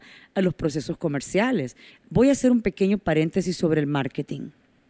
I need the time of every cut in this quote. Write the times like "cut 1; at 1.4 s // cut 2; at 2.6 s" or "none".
cut 1; at 1.9 s